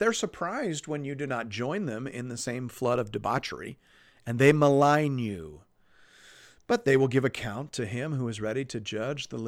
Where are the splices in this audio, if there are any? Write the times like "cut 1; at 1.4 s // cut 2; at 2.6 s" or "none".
none